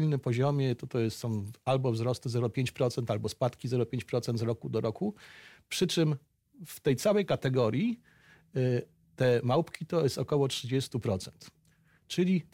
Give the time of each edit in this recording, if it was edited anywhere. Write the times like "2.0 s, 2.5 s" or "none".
none